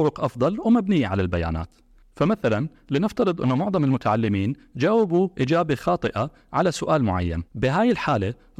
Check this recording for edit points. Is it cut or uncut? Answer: cut